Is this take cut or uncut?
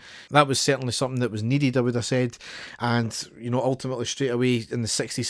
uncut